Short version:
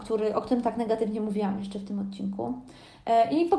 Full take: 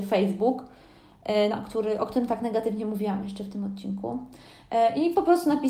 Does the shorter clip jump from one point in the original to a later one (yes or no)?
no